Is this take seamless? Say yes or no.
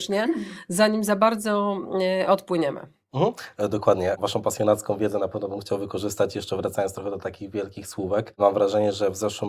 yes